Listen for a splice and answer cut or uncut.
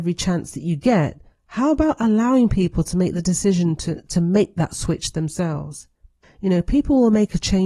uncut